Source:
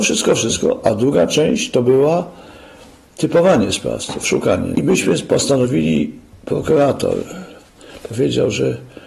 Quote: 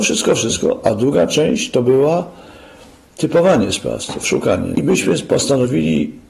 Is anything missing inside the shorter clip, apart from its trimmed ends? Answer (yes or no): no